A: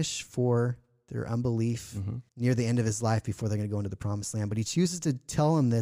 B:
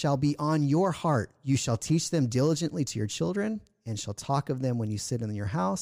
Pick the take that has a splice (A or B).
A